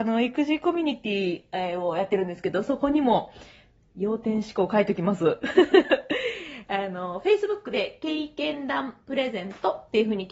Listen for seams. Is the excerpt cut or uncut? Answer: cut